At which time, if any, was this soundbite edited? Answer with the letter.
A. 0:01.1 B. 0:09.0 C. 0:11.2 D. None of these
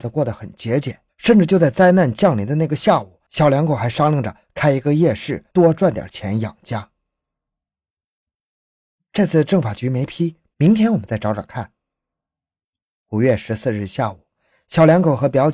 A